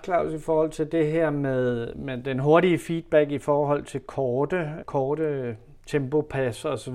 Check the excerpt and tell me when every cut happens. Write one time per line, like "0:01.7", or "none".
0:04.8